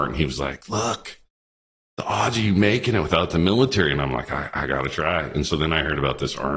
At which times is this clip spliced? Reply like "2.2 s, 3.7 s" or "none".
none